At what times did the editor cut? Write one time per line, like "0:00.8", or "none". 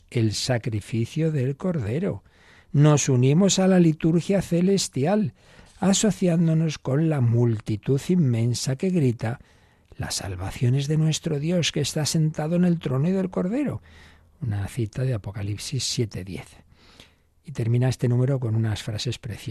none